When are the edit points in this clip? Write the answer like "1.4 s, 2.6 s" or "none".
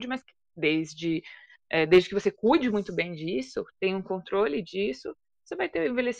none